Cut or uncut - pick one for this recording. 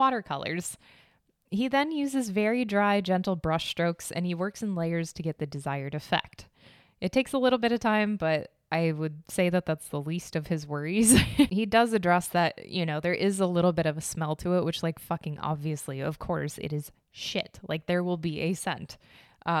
uncut